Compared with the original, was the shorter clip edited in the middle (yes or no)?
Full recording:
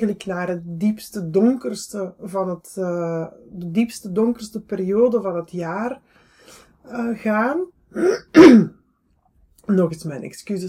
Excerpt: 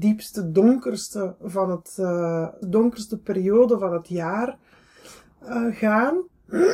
yes